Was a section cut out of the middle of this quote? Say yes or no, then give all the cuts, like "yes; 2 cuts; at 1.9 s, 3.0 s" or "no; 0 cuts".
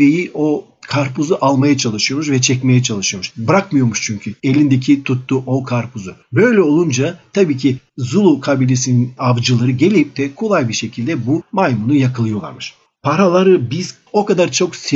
yes; 2 cuts; at 3.3 s, 13.0 s